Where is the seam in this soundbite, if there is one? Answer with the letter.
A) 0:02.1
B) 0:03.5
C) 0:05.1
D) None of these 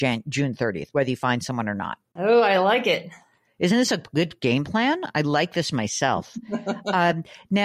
A